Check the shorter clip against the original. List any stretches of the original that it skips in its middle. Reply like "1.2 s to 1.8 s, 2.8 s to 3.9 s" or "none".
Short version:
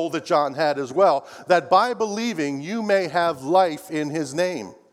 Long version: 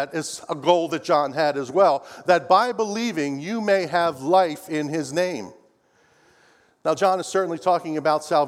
none